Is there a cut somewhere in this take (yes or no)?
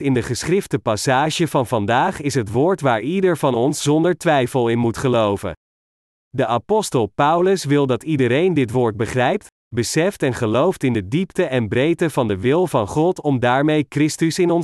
no